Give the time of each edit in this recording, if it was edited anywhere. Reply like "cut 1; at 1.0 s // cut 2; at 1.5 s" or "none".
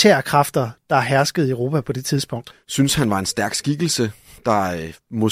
cut 1; at 2.5 s